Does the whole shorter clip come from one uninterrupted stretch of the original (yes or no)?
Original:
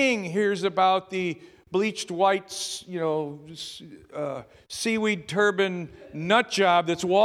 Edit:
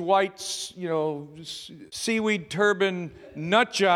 no